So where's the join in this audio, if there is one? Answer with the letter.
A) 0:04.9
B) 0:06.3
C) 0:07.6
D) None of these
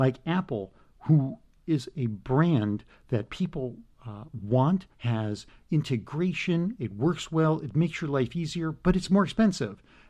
A